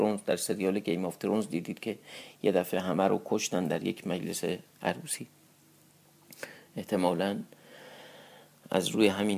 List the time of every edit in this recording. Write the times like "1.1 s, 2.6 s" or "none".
none

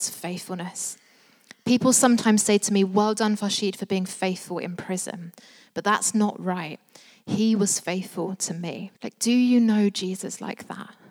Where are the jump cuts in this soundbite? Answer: 9.0 s

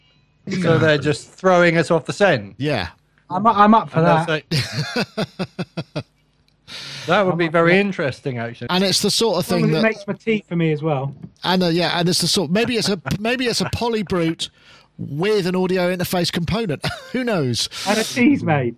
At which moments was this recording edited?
8.7 s, 11.3 s

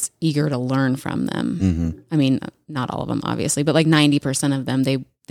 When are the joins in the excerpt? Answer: none

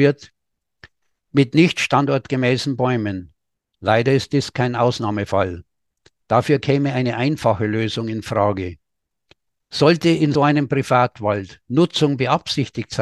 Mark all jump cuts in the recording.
10.3 s

